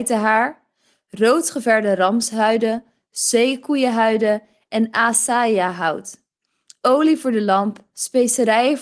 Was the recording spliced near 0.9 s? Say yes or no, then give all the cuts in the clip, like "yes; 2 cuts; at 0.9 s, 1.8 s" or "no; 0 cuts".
no; 0 cuts